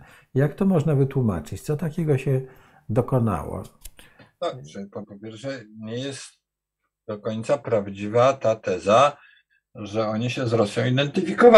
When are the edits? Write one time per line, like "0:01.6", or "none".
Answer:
0:05.0

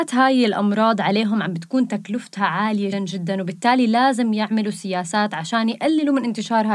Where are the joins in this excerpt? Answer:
0:02.9

